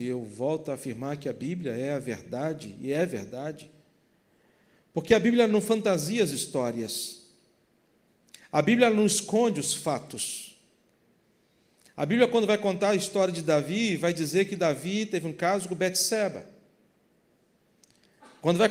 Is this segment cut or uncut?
uncut